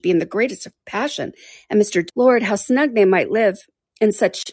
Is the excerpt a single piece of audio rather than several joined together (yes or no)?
no